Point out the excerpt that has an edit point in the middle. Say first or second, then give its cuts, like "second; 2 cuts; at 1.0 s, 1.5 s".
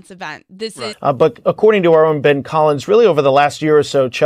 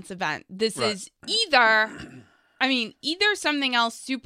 first; 1 cut; at 0.9 s